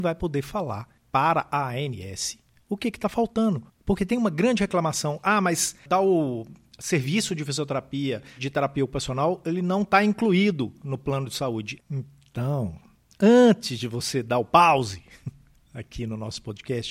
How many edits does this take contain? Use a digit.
2